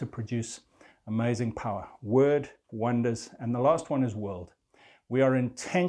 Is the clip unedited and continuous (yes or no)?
no